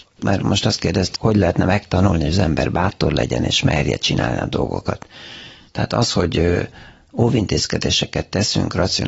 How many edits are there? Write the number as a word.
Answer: two